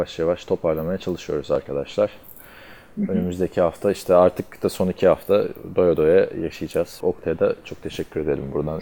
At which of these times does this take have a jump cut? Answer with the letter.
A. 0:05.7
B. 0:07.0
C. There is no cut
B